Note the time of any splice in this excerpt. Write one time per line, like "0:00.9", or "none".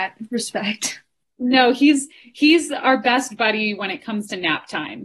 none